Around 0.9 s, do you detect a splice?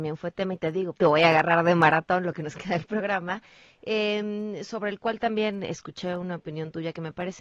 yes; 1 cut; at 0.9 s

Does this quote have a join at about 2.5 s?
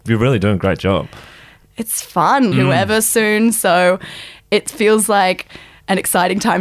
yes; 1 cut; at 2.5 s

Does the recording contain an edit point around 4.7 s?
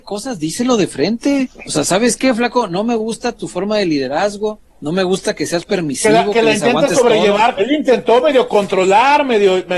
yes; 3 cuts; at 1.5 s, 4.7 s, 7.6 s

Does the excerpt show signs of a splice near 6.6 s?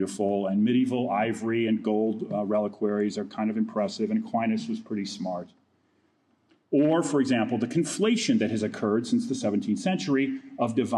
yes; 1 cut; at 6.6 s

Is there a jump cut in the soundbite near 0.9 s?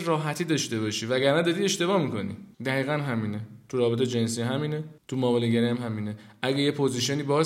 no; 2 cuts; at 2.5 s, 5.0 s

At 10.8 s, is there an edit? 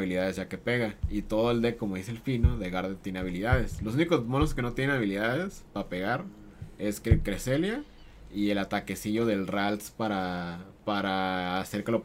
yes; 1 cut; at 10.8 s

